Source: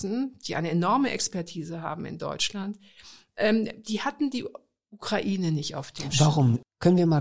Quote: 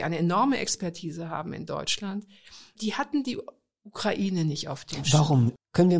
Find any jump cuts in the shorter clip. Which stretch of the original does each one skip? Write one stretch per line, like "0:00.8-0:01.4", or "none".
0:03.3-0:03.8